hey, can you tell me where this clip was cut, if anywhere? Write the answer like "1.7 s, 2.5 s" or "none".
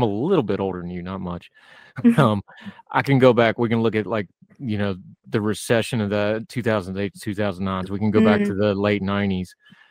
none